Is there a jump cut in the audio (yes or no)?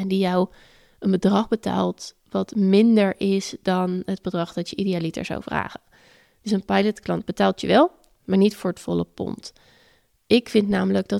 no